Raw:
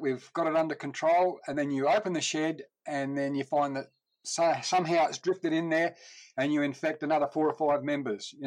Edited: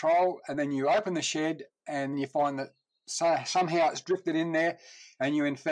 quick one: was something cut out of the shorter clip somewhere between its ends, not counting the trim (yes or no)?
yes